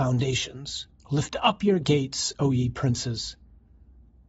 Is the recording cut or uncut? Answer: cut